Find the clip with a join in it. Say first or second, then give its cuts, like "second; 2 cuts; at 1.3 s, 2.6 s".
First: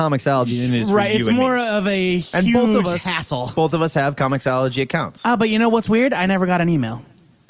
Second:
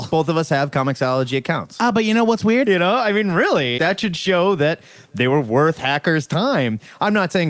second; 2 cuts; at 2.6 s, 3.8 s